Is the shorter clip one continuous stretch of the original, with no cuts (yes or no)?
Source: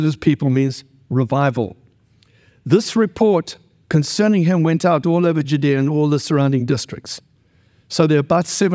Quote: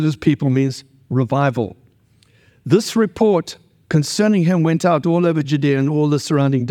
yes